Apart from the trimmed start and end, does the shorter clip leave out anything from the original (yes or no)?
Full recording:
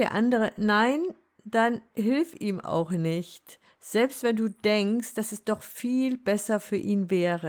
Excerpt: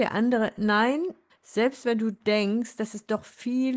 yes